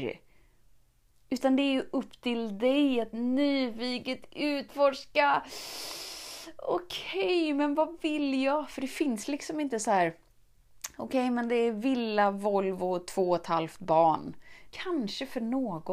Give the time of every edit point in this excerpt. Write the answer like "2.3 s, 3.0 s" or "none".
14.7 s